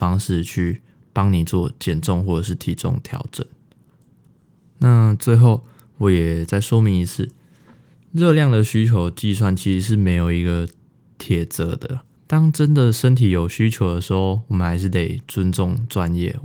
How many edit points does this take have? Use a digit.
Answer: 1